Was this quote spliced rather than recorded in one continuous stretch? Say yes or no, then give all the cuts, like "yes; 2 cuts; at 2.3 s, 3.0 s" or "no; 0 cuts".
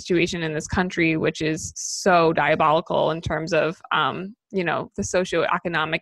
no; 0 cuts